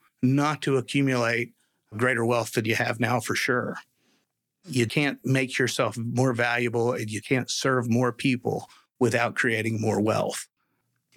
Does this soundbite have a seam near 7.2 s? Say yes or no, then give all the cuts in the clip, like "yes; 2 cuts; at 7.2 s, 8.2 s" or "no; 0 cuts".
yes; 2 cuts; at 4.9 s, 7.2 s